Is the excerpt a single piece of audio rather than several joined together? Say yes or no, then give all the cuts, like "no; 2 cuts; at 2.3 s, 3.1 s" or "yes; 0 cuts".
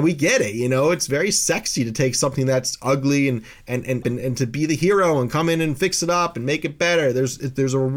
no; 1 cut; at 4.0 s